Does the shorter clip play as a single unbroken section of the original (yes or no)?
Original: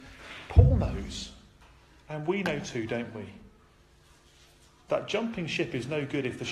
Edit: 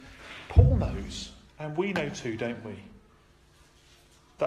no